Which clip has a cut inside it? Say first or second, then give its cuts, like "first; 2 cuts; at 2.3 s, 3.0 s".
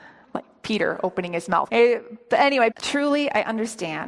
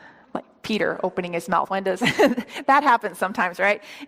first; 2 cuts; at 1.7 s, 2.7 s